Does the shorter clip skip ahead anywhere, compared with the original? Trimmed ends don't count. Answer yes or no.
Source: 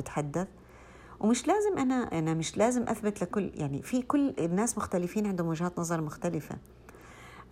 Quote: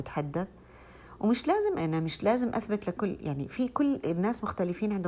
yes